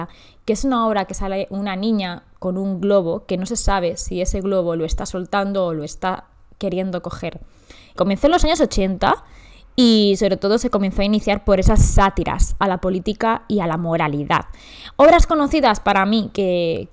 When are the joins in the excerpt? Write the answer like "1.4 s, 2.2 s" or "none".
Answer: 8.0 s